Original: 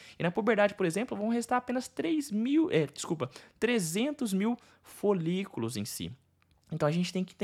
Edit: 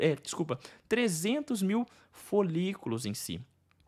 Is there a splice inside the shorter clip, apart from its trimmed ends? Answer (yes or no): no